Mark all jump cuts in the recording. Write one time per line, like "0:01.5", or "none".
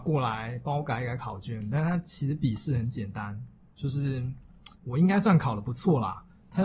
0:04.7